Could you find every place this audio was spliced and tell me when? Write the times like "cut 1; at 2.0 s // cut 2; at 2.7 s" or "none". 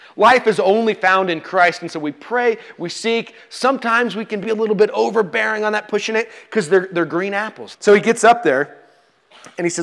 cut 1; at 4.4 s // cut 2; at 7.7 s